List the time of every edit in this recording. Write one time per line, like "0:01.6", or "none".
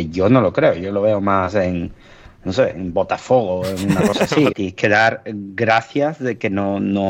0:04.5

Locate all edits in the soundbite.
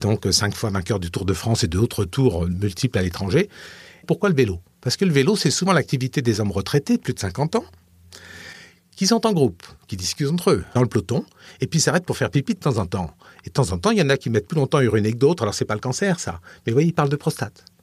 none

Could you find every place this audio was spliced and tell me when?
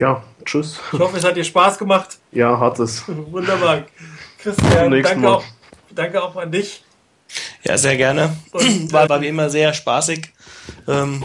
0:09.1

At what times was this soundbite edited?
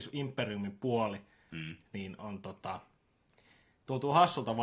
none

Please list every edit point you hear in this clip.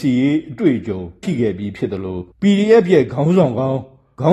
0:01.2
0:02.3

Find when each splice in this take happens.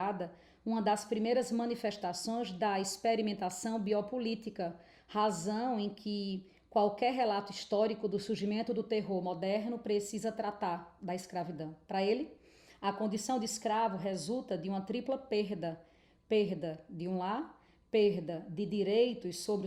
none

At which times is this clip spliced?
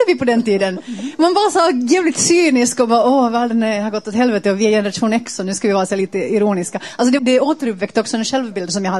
0:07.2

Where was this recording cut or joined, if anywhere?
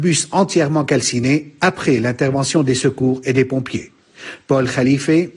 none

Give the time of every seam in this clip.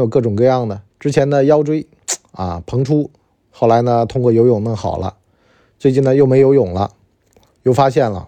0:00.9

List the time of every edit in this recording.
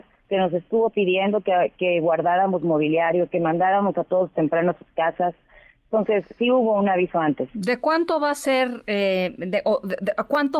none

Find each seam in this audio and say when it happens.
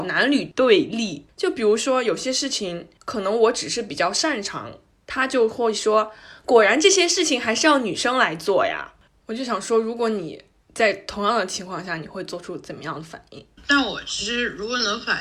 0:09.1
0:13.6

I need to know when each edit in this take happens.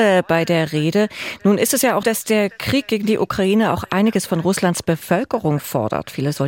0:02.0

